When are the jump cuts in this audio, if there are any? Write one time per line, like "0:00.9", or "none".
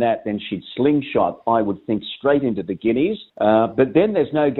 0:03.3